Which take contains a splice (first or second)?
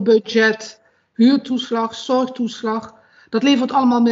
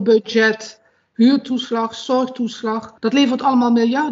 second